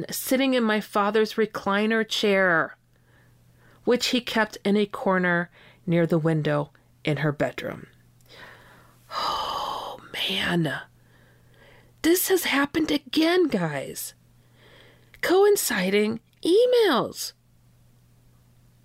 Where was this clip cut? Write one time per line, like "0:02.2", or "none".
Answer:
none